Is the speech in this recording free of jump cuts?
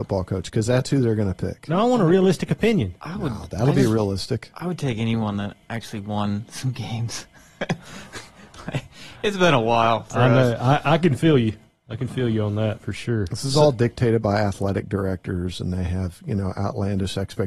yes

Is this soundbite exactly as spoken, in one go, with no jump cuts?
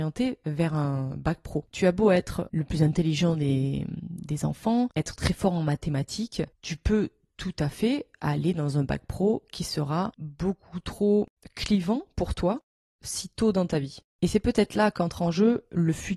no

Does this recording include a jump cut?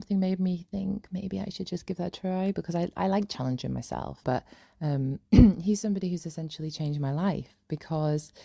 yes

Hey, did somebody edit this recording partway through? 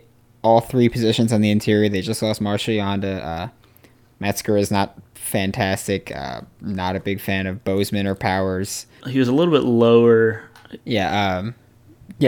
yes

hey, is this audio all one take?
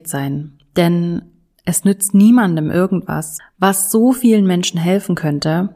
no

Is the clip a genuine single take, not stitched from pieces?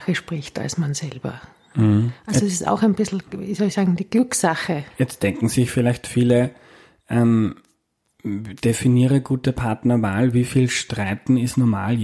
no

